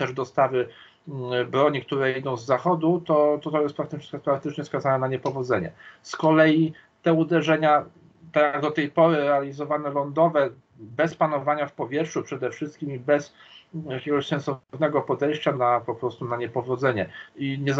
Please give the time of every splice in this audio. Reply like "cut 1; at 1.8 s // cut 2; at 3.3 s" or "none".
cut 1; at 15.5 s